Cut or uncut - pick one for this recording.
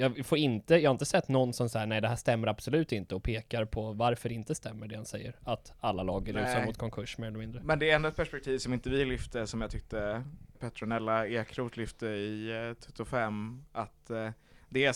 cut